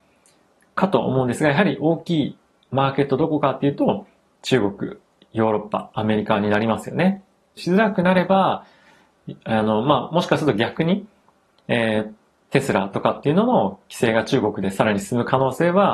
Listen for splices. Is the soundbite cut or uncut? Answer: cut